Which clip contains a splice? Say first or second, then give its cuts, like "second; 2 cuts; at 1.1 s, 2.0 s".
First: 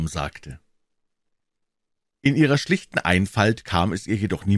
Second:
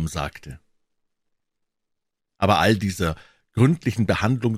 first; 1 cut; at 2.1 s